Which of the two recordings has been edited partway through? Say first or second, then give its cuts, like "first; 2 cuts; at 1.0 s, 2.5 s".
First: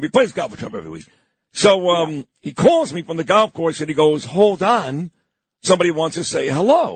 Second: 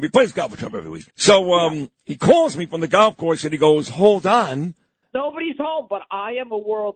second; 2 cuts; at 1.1 s, 5.0 s